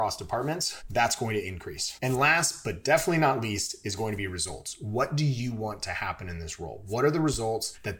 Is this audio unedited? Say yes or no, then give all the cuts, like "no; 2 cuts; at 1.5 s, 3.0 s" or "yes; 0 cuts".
yes; 0 cuts